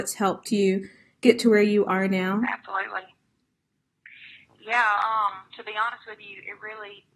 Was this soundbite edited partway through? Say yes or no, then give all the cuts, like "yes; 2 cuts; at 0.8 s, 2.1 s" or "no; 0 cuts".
no; 0 cuts